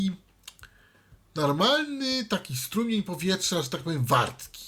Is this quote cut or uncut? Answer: uncut